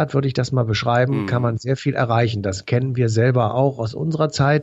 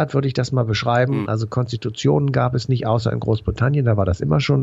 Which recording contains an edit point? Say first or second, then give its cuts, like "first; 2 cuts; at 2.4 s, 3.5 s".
second; 1 cut; at 1.3 s